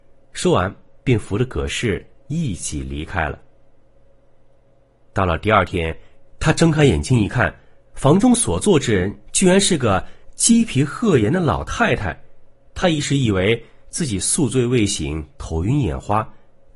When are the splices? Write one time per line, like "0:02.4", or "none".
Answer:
0:06.3